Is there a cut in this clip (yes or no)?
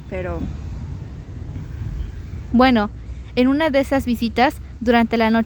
yes